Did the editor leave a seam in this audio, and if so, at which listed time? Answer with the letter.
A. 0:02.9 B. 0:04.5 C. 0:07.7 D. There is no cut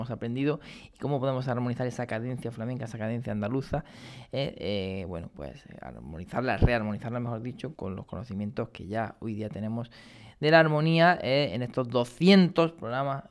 C